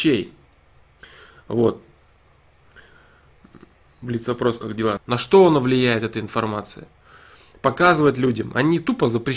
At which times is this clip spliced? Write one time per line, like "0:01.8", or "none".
0:05.0